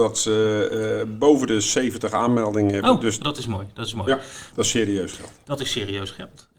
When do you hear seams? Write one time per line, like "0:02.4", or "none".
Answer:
0:03.2
0:04.5